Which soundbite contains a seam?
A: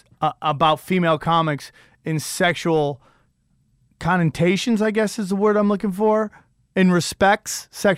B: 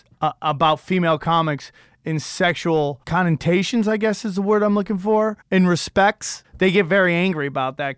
B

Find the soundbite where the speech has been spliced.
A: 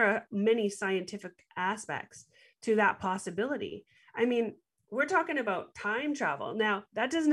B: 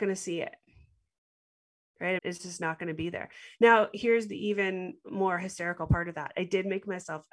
B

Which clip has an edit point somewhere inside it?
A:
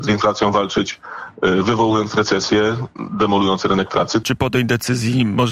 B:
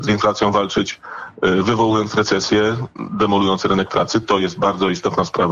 A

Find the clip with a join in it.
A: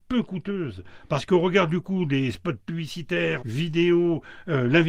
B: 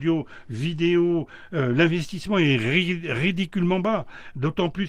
A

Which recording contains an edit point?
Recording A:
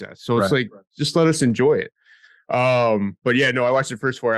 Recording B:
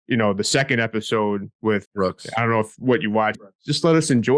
B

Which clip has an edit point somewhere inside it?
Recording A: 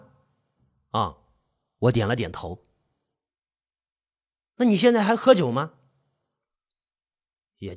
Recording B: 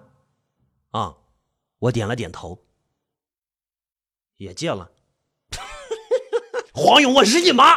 B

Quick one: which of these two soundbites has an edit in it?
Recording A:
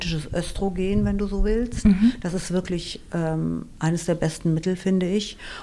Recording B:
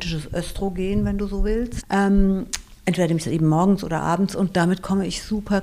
B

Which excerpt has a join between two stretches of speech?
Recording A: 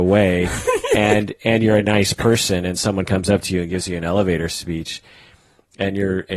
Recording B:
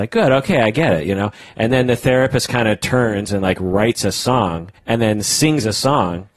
B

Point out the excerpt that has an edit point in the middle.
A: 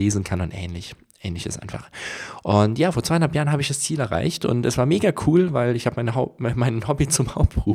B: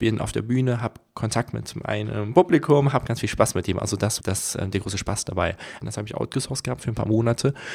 B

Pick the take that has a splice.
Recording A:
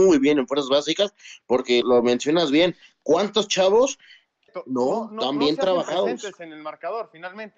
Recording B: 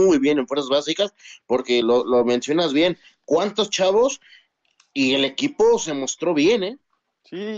A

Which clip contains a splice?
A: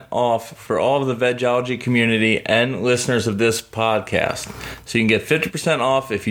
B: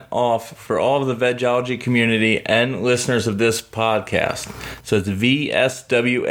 B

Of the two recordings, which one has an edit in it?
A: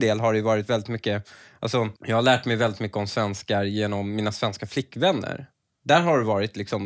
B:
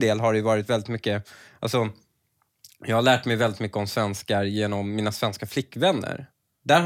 A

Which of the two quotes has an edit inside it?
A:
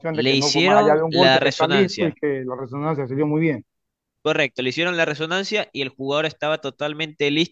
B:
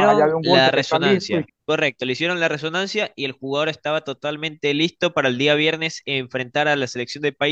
B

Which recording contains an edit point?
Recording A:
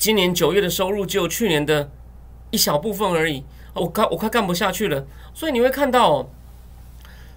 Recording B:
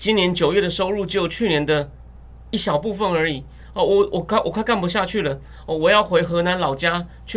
A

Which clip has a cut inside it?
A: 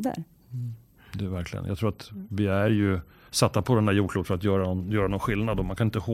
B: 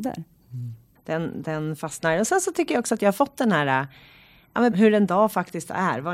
B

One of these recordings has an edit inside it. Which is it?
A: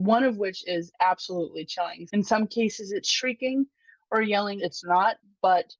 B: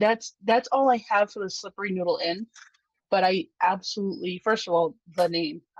A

